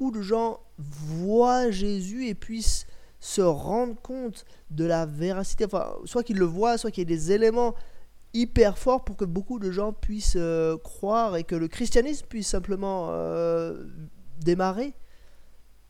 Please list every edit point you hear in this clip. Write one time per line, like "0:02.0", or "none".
none

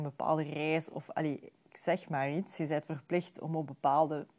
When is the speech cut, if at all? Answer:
none

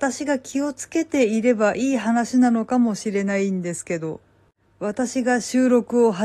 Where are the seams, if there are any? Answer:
none

